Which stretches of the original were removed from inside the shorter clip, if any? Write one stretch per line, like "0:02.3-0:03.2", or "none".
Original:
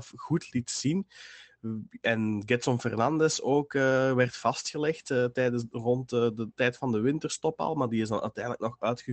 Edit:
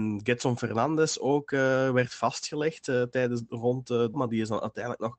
0:06.4-0:07.7